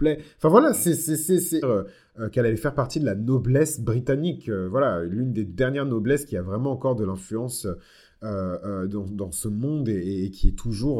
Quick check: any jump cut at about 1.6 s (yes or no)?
yes